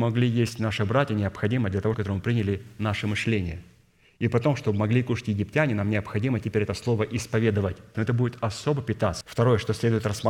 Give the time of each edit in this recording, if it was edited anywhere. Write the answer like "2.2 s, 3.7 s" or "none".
1.9 s, 7.9 s, 9.2 s